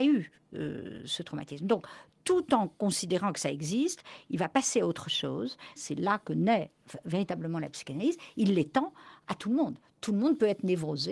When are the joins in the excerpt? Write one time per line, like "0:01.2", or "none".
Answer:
0:05.8